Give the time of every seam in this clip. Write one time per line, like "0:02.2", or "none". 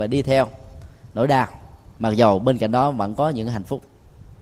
none